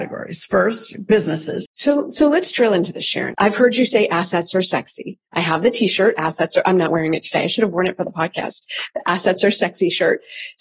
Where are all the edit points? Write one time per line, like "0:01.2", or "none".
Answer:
0:01.7
0:03.3